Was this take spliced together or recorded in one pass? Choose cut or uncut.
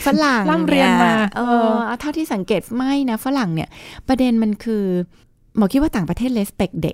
uncut